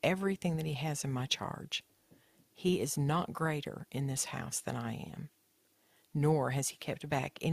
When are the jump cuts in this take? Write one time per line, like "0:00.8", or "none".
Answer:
none